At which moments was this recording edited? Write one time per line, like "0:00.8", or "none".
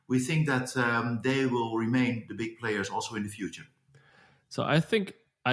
none